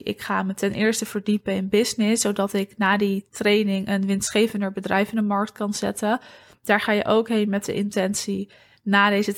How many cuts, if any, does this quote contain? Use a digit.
1